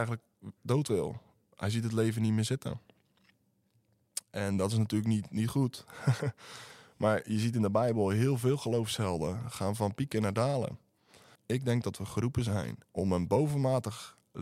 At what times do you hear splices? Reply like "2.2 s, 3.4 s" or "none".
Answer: 11.4 s, 12.8 s